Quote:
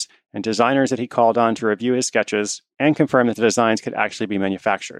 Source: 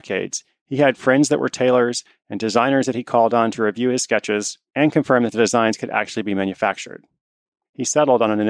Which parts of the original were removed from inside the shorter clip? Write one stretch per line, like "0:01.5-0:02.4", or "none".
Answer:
none